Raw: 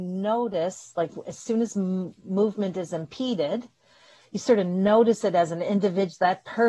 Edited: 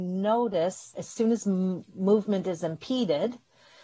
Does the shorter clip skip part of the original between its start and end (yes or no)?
yes